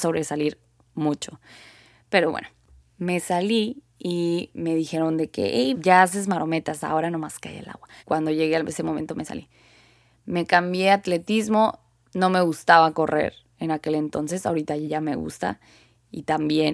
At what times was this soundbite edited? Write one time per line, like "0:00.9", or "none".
0:05.7
0:08.0